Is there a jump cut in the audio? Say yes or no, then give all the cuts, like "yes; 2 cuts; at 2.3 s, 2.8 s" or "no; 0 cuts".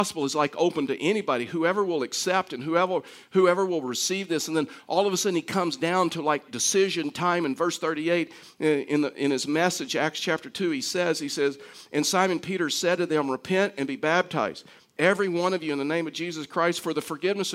no; 0 cuts